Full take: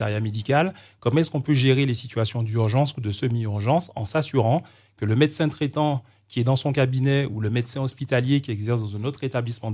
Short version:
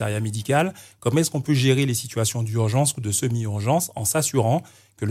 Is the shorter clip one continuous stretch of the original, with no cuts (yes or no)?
yes